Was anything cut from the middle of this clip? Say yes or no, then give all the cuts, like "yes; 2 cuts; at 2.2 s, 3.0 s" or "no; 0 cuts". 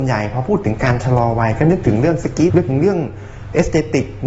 yes; 1 cut; at 2.5 s